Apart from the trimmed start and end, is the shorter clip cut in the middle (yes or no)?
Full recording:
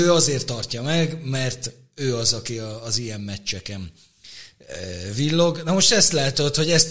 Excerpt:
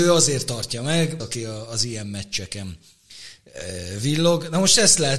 yes